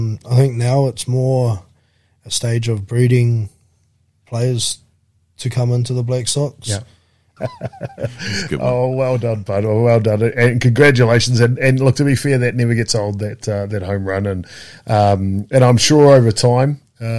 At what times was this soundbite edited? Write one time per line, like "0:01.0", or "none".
0:07.4